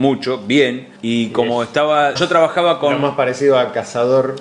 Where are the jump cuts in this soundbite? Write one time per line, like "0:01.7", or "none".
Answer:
0:01.0
0:02.2